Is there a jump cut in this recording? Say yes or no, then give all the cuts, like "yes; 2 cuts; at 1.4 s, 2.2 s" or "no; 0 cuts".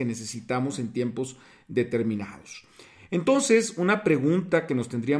no; 0 cuts